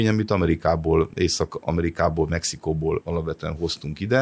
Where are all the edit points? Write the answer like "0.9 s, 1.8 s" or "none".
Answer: none